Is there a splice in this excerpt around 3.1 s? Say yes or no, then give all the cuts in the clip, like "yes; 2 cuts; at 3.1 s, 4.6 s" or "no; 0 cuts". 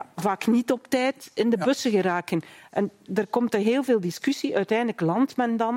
yes; 1 cut; at 3.1 s